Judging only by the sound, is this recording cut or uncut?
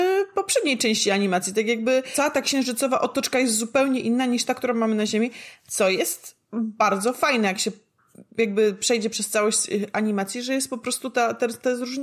cut